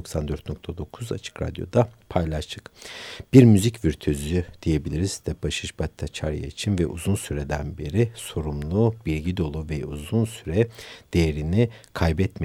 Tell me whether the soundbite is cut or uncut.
uncut